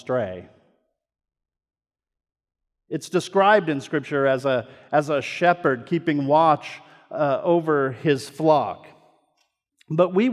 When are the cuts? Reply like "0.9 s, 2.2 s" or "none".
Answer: none